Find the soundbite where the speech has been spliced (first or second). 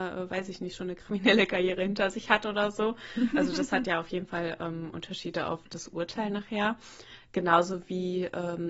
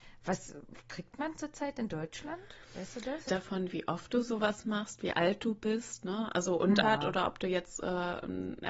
second